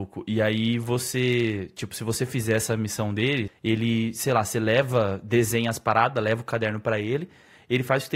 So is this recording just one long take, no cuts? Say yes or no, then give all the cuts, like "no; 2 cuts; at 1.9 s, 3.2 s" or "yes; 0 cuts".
no; 1 cut; at 3.5 s